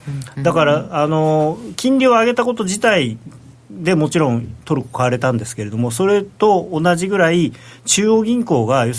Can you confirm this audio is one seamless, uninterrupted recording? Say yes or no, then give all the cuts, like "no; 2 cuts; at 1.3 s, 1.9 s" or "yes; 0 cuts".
yes; 0 cuts